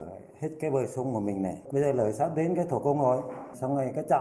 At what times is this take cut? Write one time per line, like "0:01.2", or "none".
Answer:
none